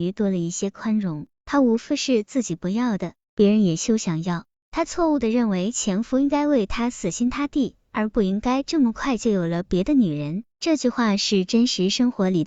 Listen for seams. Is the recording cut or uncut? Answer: cut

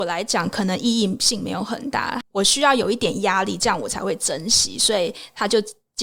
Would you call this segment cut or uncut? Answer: cut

